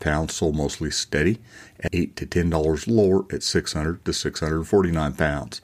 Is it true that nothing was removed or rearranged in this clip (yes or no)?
no